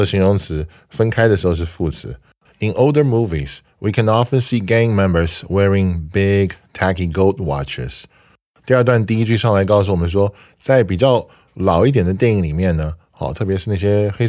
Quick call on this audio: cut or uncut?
cut